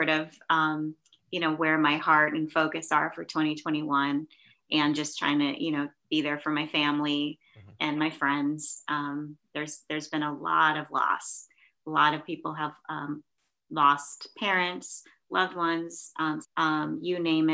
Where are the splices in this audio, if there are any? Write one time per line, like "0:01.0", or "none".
0:16.4